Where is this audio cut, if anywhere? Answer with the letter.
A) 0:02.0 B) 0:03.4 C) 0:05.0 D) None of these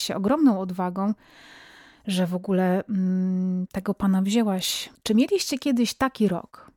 C